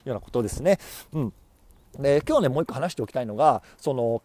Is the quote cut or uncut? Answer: uncut